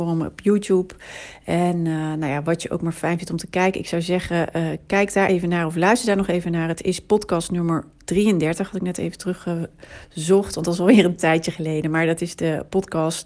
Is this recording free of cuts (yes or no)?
yes